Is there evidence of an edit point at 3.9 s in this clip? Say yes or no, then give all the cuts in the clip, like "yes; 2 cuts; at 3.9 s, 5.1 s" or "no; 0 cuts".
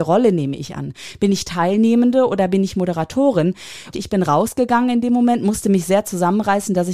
yes; 1 cut; at 3.9 s